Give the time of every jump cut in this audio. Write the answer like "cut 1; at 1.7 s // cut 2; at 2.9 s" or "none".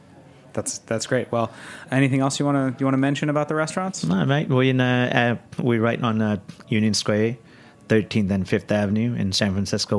cut 1; at 1.9 s